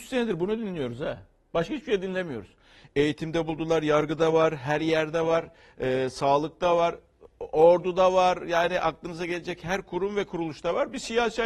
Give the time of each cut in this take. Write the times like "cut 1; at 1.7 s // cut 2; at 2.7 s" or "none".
none